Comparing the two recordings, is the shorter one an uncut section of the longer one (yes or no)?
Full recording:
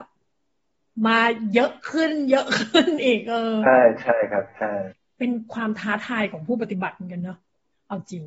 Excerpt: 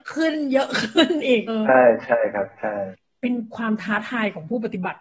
no